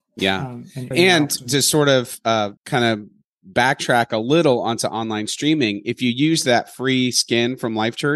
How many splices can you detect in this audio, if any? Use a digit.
2